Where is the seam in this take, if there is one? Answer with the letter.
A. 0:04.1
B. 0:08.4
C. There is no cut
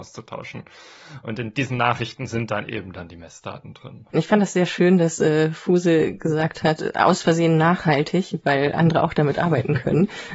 A